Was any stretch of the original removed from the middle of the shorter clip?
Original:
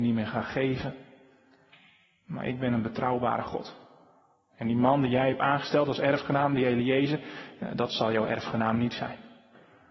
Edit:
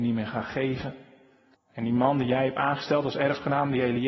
yes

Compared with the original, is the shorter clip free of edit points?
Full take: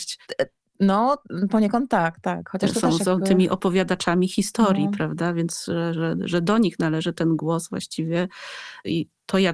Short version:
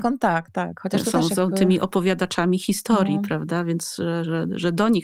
yes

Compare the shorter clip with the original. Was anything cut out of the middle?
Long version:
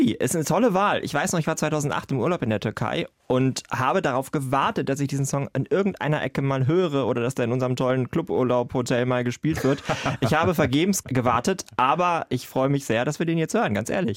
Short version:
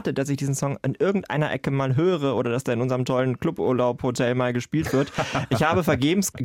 no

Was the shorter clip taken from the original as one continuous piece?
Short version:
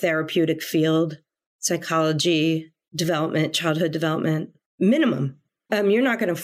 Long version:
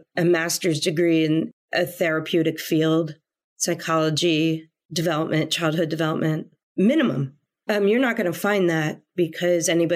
yes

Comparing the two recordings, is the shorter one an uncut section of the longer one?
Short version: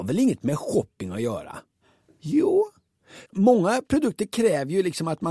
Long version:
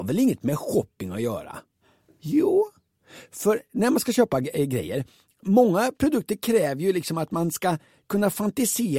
no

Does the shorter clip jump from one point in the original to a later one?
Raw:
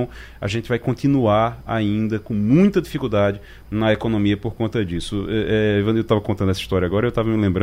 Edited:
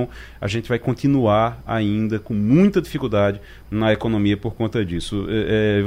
no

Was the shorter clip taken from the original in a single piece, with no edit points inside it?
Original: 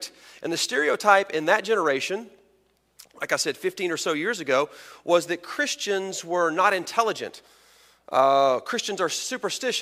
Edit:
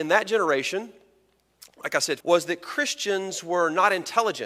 no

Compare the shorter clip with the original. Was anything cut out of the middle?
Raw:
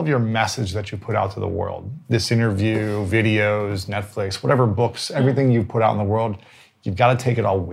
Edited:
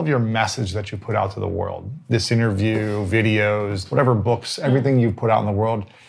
yes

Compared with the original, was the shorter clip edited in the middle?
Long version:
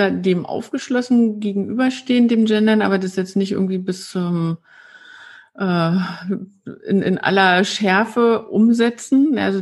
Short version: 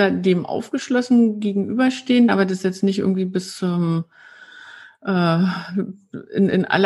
yes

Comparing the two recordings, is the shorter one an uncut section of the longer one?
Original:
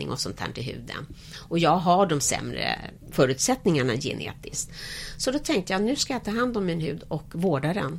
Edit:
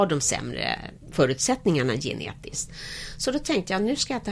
yes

